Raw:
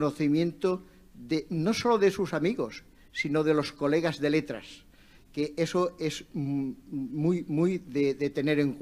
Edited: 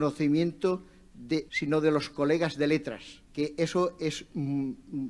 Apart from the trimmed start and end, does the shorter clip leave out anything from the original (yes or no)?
yes